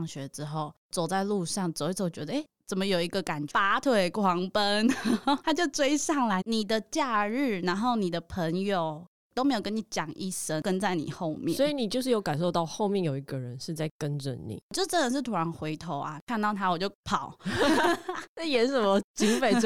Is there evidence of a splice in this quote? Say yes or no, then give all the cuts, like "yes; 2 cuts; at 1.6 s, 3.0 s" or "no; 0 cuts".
yes; 2 cuts; at 3.5 s, 6.4 s